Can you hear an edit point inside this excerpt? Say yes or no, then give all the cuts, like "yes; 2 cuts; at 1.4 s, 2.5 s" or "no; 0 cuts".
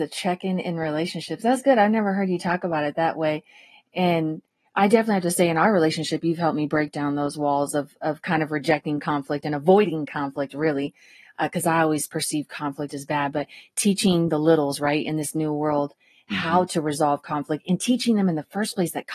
no; 0 cuts